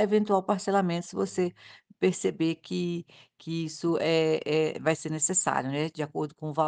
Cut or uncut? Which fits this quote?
uncut